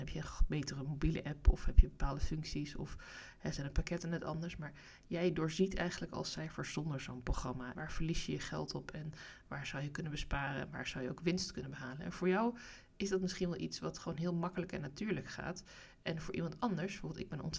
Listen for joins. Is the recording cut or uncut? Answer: cut